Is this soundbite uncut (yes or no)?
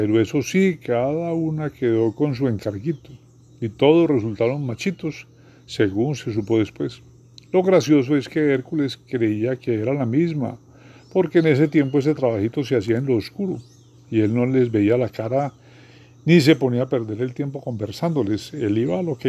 yes